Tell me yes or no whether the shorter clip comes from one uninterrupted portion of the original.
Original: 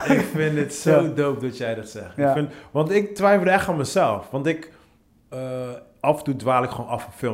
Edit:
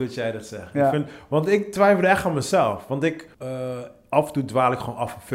no